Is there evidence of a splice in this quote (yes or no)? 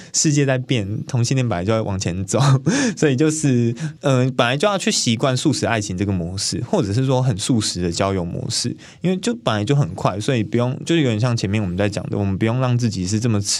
no